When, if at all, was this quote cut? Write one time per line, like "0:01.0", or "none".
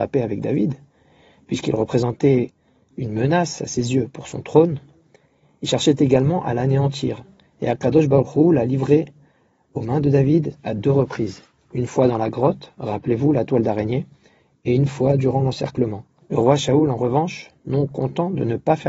0:16.2